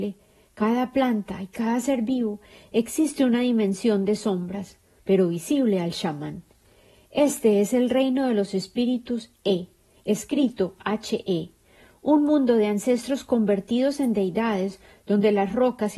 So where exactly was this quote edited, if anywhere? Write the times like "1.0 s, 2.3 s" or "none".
5.0 s